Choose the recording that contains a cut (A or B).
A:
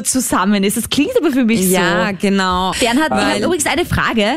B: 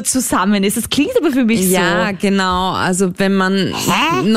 A